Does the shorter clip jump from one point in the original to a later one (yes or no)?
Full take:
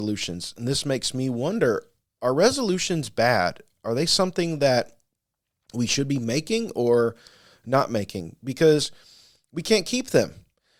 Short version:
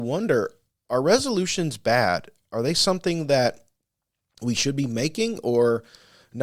no